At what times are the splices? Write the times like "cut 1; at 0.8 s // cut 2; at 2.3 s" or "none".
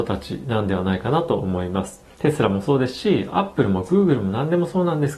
cut 1; at 2.1 s